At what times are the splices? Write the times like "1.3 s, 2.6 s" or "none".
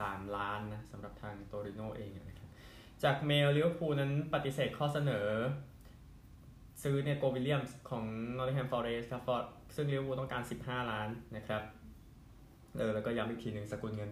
none